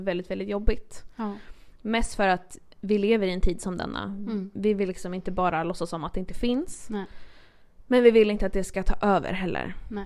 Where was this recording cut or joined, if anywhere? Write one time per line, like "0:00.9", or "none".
0:01.7